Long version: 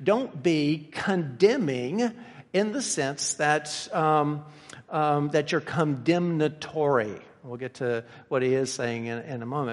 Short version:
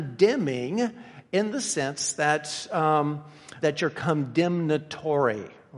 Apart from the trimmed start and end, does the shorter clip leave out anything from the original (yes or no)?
yes